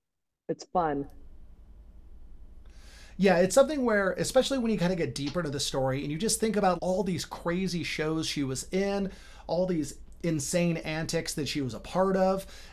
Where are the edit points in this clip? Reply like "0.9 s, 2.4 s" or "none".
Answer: 6.8 s